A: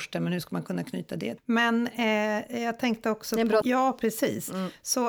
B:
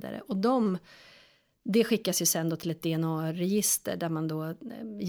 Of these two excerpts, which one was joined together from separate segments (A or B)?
A